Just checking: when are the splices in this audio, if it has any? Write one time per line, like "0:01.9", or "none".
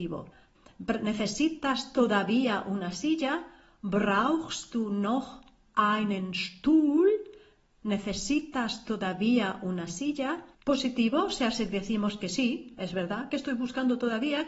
0:10.5